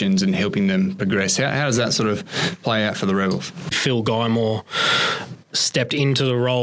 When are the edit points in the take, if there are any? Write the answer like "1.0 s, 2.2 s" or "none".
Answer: 3.7 s